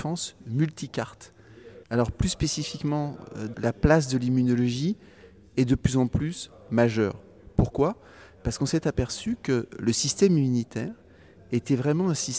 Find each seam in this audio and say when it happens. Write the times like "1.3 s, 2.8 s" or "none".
1.8 s, 3.5 s